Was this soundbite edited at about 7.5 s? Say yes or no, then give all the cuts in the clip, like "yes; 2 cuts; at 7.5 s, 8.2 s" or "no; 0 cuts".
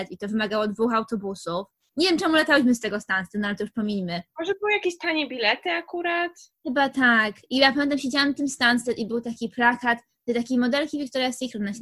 no; 0 cuts